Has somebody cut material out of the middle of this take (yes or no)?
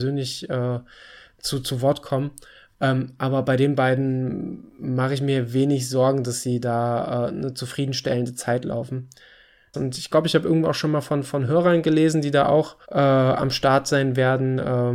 yes